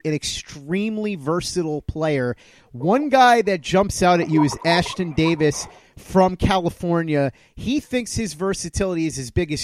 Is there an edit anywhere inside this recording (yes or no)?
yes